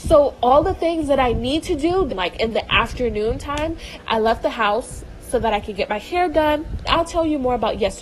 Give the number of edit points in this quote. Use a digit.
3